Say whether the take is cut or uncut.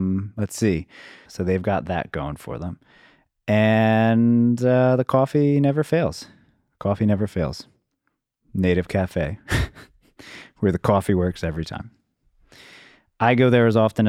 cut